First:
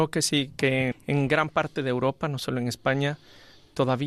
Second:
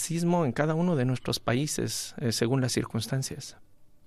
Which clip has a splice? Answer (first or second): first